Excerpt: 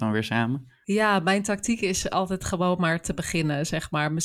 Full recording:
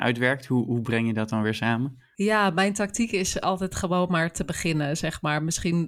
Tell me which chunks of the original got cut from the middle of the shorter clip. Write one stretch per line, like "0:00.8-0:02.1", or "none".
none